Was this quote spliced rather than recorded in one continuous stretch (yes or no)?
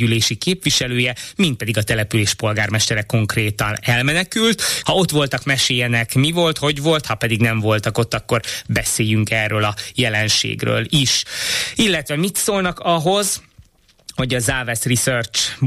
yes